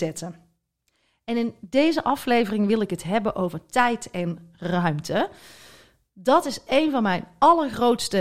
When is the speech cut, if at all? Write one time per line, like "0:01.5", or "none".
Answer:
none